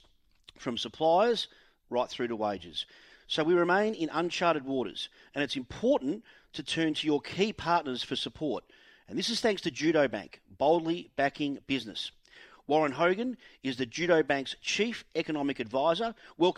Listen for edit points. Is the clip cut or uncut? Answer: uncut